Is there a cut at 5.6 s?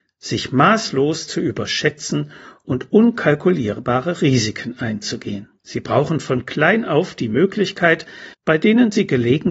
yes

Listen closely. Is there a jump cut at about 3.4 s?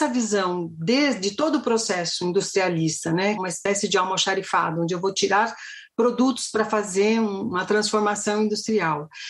yes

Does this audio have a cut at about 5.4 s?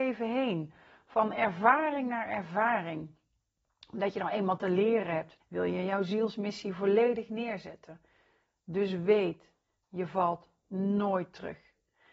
yes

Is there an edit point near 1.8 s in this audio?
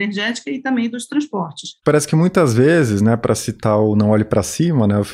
yes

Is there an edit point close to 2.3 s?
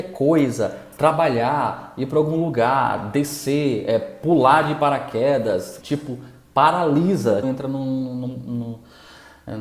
no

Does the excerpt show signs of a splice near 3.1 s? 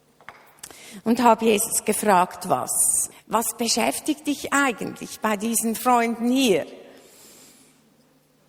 yes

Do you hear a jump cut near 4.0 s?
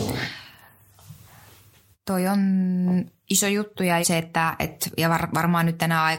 yes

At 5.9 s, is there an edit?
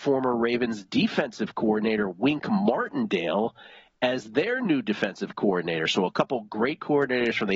no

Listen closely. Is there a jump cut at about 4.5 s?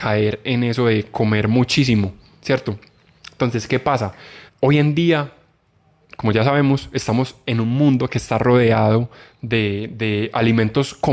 yes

